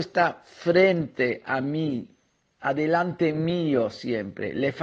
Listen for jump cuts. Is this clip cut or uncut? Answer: uncut